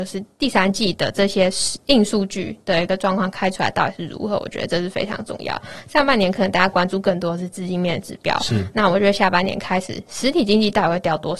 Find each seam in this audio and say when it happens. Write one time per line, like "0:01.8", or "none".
none